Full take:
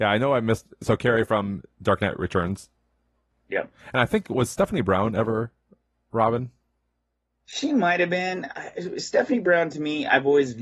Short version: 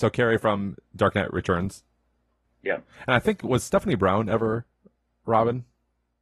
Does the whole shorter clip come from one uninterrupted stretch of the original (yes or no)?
yes